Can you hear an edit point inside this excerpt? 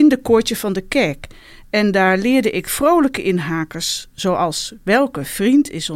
no; 0 cuts

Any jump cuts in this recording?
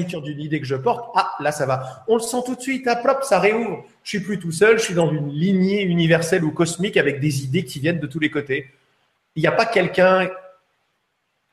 no; 0 cuts

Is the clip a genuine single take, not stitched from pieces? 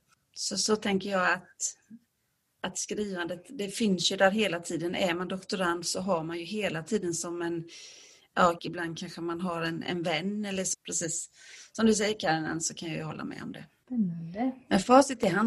no; 2 cuts; at 8.6 s, 10.7 s

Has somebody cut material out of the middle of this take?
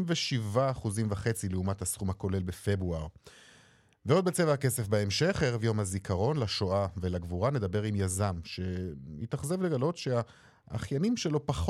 no; 0 cuts

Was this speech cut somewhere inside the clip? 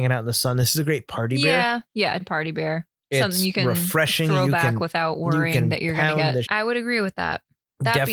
yes; 2 cuts; at 2.2 s, 6.4 s

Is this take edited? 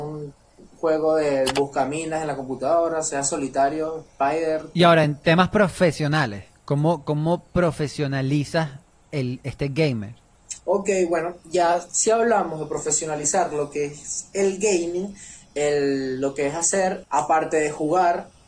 no; 0 cuts

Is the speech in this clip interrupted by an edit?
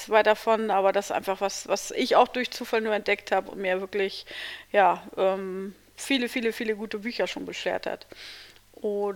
no; 0 cuts

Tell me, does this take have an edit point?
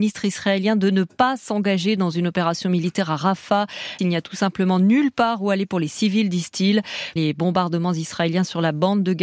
yes; 2 cuts; at 4.0 s, 7.2 s

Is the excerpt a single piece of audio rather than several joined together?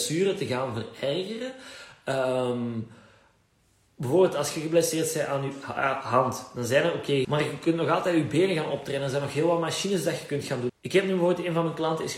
no; 2 cuts; at 7.2 s, 10.7 s

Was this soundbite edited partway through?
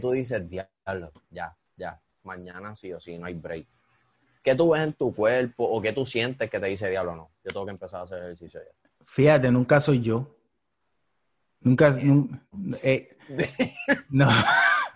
no; 0 cuts

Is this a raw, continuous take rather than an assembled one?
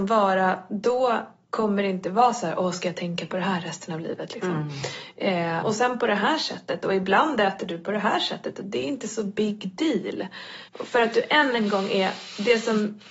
no; 2 cuts; at 5.6 s, 10.7 s

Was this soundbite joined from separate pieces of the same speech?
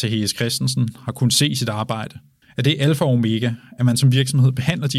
yes; 1 cut; at 2.4 s

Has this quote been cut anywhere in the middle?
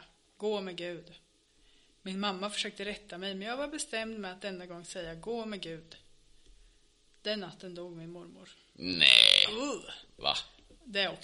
no; 0 cuts

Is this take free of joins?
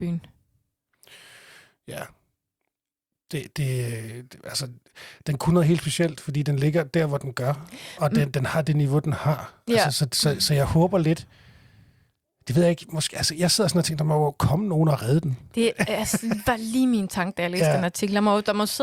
yes; 0 cuts

